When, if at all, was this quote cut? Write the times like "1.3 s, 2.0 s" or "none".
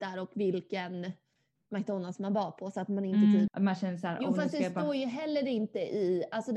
3.5 s